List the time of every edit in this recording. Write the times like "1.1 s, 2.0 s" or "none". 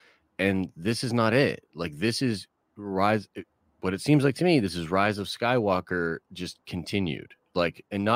none